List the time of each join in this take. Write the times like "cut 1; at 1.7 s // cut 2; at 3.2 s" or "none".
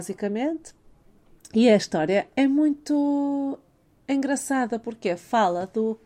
none